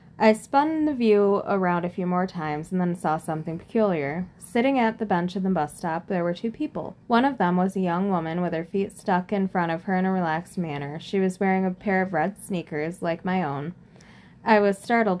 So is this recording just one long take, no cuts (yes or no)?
no